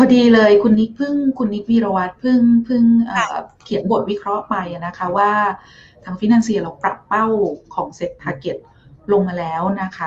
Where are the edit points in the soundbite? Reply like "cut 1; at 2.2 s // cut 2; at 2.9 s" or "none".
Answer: none

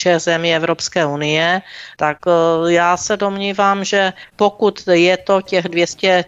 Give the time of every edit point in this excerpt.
cut 1; at 2.0 s

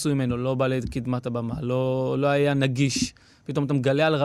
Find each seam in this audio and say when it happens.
none

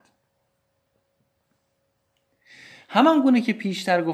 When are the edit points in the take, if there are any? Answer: none

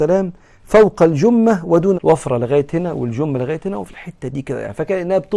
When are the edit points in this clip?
cut 1; at 1.9 s

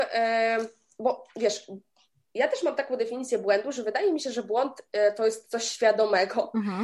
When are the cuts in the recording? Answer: none

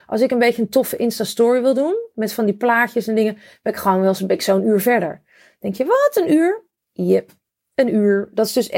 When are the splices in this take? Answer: none

